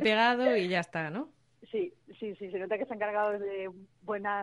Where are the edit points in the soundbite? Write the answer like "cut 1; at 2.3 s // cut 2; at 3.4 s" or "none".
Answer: none